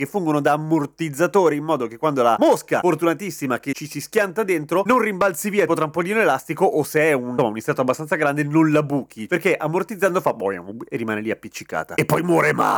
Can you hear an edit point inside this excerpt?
yes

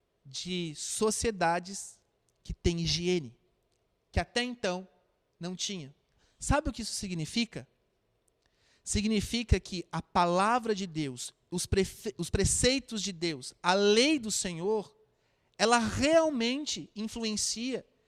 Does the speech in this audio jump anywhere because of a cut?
no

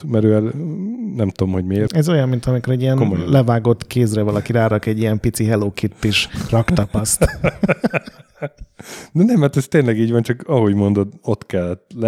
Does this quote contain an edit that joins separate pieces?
yes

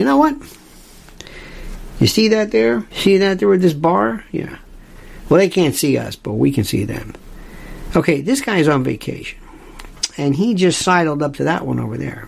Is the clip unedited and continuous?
no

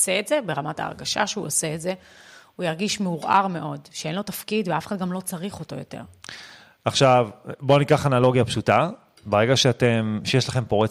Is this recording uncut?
yes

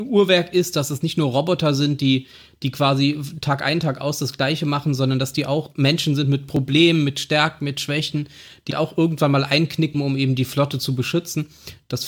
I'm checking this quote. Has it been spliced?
yes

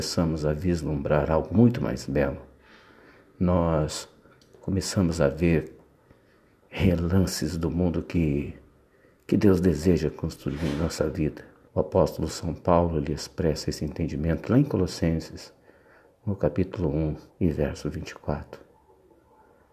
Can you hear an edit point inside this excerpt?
yes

